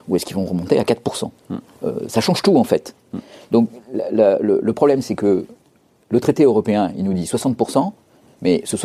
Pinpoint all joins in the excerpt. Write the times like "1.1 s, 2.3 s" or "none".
none